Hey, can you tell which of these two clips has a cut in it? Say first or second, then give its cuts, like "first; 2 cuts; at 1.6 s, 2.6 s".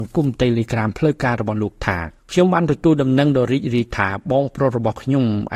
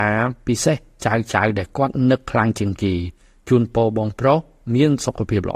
first; 1 cut; at 2.2 s